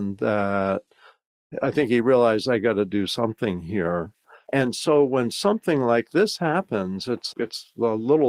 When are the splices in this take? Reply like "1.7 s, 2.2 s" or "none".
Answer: 4.4 s, 7.3 s